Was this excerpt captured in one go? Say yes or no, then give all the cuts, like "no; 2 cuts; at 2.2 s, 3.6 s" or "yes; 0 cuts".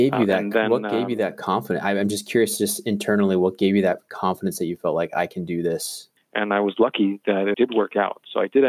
no; 2 cuts; at 6.2 s, 7.5 s